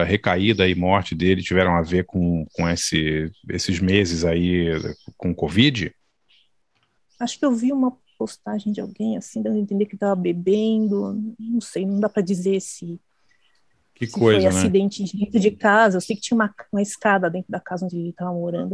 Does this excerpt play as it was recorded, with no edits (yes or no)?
no